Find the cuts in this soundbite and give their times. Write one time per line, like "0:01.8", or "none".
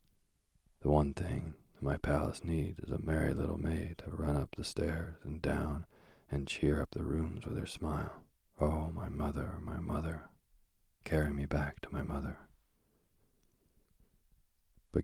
0:08.5